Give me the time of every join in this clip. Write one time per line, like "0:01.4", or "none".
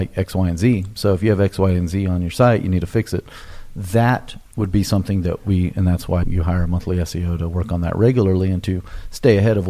0:04.5
0:06.2